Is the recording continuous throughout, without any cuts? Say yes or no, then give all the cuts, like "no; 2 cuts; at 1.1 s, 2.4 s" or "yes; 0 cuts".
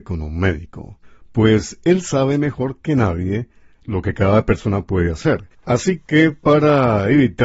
no; 1 cut; at 5.5 s